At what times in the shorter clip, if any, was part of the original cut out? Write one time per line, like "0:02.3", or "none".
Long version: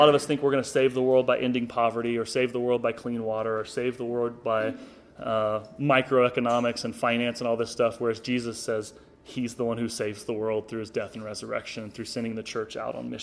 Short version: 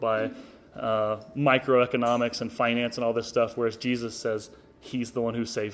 none